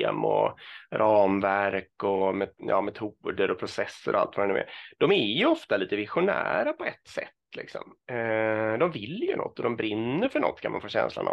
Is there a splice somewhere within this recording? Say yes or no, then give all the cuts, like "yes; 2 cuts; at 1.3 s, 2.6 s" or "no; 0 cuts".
no; 0 cuts